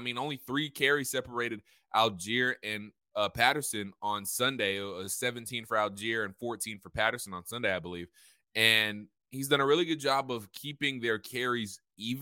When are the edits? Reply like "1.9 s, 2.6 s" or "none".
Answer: none